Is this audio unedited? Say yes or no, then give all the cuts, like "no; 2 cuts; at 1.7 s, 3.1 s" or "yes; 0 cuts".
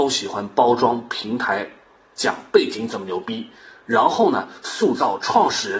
yes; 0 cuts